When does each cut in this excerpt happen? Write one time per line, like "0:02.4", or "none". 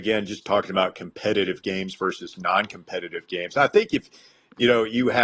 none